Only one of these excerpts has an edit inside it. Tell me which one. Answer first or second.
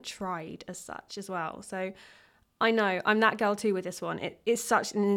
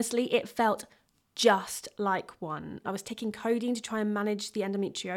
second